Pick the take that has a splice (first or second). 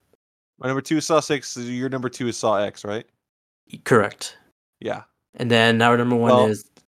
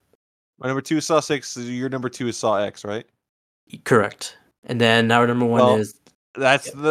second